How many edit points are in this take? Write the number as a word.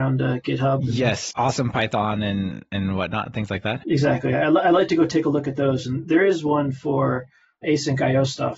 zero